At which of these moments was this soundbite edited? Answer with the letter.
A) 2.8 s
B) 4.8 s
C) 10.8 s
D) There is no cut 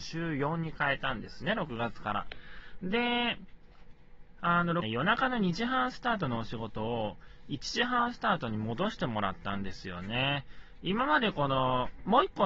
B